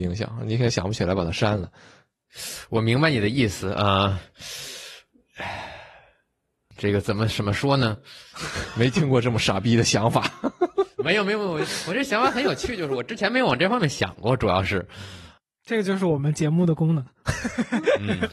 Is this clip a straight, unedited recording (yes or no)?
yes